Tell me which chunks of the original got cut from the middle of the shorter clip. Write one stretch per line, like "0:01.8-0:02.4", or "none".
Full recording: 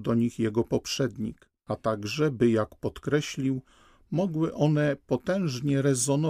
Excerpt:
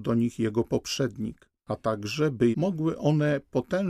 0:02.5-0:04.1

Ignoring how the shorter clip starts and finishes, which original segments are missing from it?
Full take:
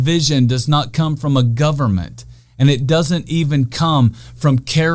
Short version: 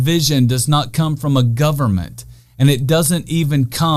none

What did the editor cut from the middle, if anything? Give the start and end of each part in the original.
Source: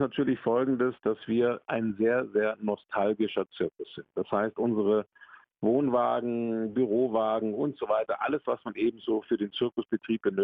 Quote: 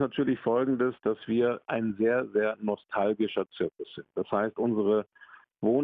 none

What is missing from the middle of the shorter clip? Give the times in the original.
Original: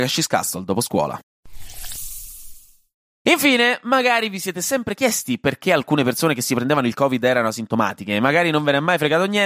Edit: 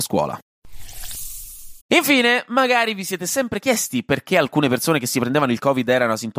0:02.6-0:03.2

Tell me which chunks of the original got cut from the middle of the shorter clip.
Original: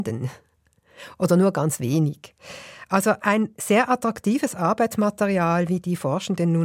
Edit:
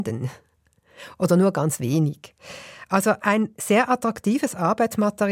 none

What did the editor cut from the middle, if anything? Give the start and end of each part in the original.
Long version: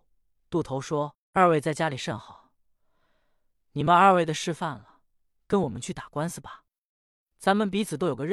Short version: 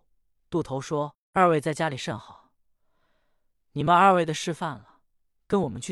none

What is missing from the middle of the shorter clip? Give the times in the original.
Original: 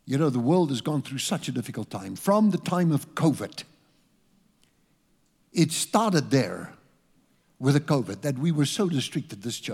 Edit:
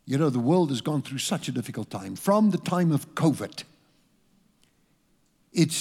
none

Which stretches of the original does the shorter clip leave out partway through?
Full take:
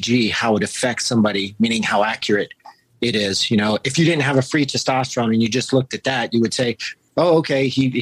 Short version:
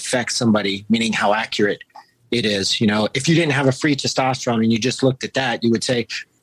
none

